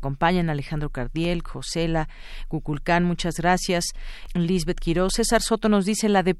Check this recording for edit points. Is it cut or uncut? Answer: cut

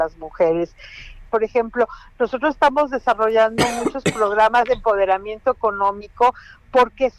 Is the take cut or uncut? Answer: cut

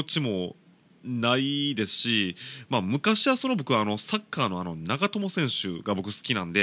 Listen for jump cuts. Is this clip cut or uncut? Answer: uncut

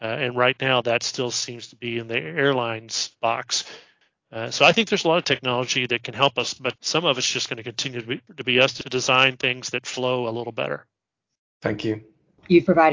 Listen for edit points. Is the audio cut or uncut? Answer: uncut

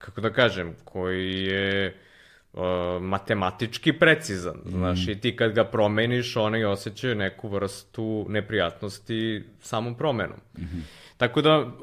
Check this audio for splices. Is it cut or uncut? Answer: uncut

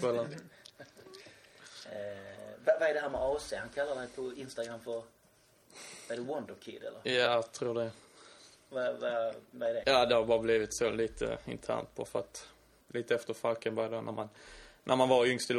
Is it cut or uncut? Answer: cut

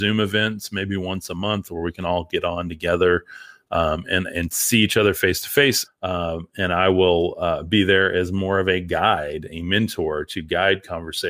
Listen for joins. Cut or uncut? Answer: cut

